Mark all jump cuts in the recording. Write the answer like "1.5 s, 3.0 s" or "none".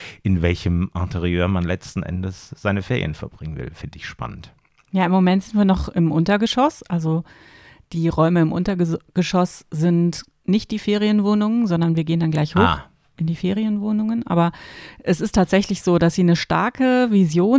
none